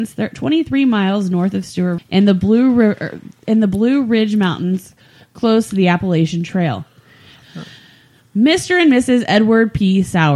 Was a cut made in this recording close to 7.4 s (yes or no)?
yes